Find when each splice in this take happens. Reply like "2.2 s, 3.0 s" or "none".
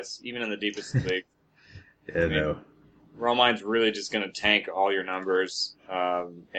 none